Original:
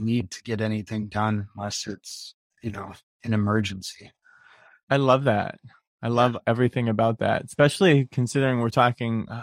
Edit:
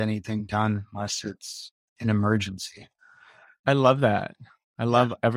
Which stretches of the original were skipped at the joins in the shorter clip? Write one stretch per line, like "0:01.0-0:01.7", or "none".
0:02.5-0:03.1